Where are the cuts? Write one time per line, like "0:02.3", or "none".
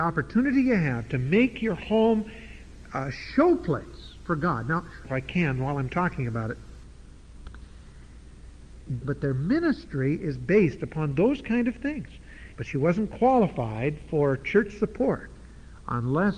0:05.0
0:09.0
0:12.5